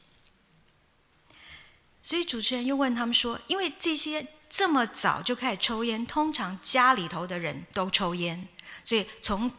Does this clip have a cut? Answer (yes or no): no